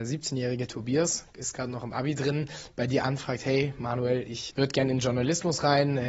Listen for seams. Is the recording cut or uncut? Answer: cut